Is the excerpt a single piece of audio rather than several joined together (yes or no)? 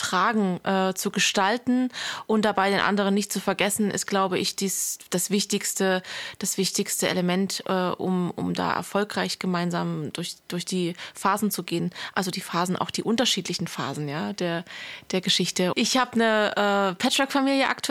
no